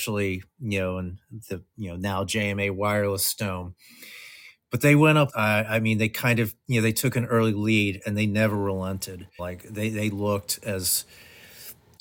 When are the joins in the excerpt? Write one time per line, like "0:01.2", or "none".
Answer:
0:05.3
0:09.4